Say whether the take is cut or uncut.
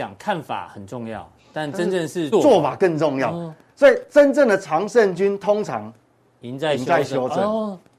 cut